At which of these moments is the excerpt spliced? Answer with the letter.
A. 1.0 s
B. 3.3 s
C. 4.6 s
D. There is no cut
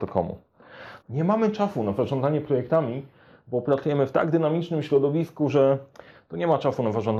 A